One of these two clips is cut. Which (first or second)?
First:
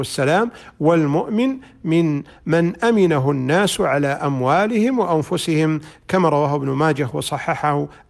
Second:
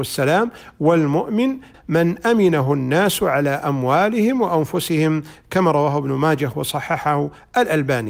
second